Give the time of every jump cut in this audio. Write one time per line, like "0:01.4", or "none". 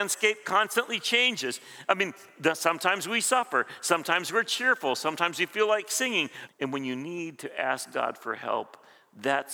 0:06.5